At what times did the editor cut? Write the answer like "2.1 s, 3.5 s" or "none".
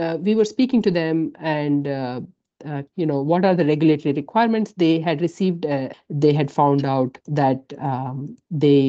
2.9 s, 5.9 s, 7.2 s